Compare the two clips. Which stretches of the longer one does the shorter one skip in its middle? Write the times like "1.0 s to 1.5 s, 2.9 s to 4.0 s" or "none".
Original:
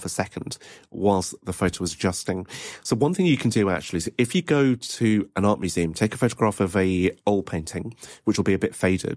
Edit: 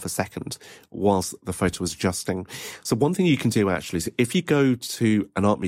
none